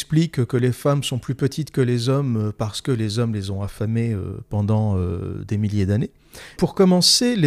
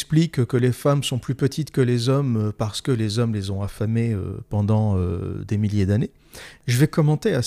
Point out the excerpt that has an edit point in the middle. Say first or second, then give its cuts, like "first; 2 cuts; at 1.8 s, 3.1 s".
first; 1 cut; at 6.6 s